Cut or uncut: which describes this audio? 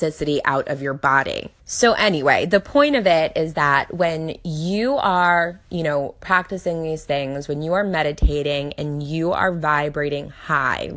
cut